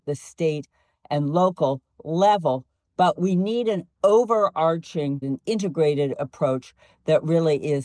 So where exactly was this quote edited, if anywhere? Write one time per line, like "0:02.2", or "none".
0:05.2